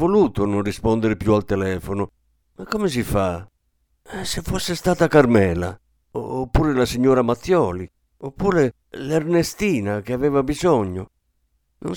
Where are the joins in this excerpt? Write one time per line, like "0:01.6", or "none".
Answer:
none

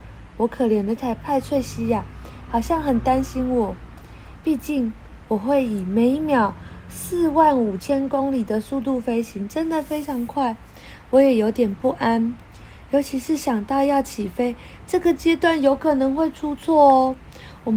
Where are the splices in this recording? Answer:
0:01.0

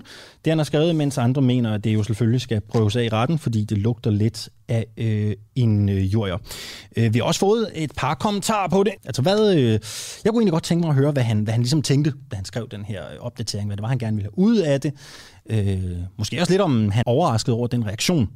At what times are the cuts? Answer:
0:09.0
0:17.0

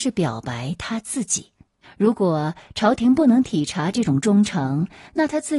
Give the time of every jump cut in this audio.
0:01.8

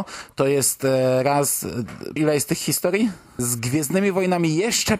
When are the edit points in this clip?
0:02.2
0:03.4

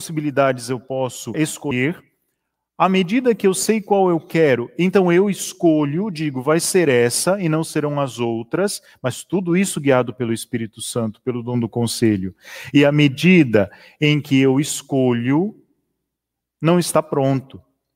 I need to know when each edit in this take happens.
0:01.3

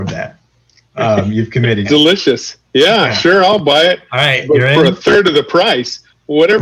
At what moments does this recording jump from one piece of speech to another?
0:01.8

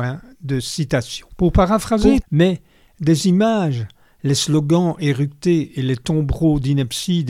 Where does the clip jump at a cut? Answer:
0:02.2

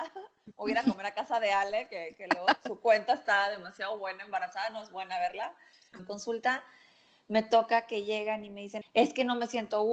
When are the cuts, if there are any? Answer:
0:06.0
0:08.8

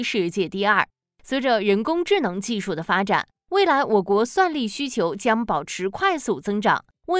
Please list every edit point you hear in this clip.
none

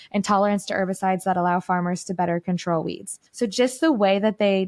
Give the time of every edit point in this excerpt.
0:03.3

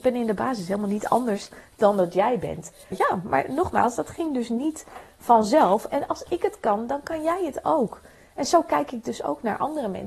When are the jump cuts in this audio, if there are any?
0:02.9

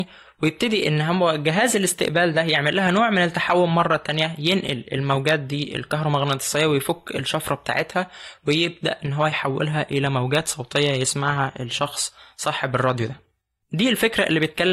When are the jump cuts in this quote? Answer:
none

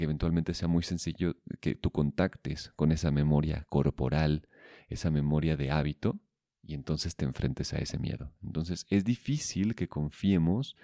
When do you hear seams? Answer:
0:08.4

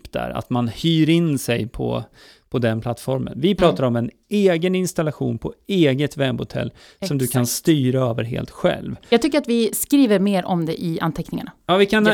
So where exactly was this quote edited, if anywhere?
none

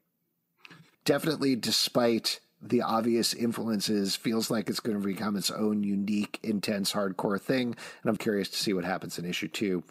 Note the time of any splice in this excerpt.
0:00.9
0:08.2

